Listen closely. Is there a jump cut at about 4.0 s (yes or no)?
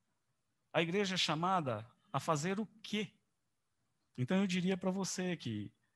yes